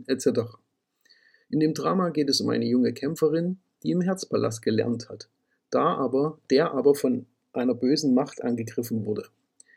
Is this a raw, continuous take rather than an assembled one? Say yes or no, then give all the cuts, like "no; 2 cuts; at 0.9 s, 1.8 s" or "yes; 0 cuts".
yes; 0 cuts